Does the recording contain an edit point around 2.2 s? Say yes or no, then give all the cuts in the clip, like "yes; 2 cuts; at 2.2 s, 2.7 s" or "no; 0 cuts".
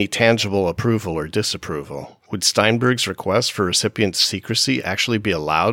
yes; 1 cut; at 2.2 s